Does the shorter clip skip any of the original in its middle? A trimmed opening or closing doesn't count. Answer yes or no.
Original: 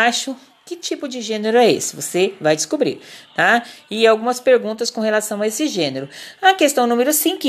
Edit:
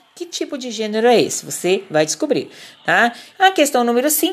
yes